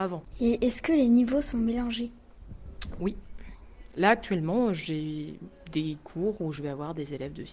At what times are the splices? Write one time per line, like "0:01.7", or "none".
none